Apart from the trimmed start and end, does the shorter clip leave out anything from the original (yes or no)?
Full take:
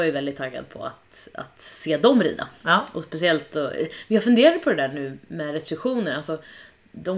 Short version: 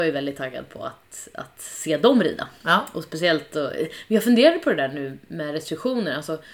no